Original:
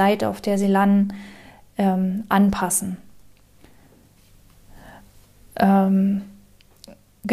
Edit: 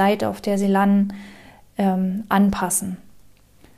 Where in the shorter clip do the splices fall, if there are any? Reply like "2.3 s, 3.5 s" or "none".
none